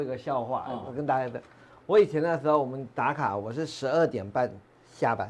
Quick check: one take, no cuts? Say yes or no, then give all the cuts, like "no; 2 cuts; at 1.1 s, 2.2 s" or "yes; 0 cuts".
yes; 0 cuts